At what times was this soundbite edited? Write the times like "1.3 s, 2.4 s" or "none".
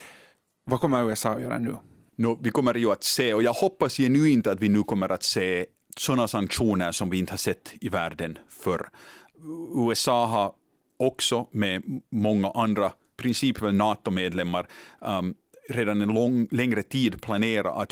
none